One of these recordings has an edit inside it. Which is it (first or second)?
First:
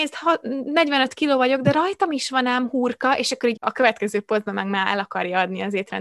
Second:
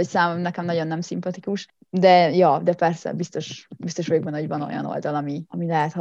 first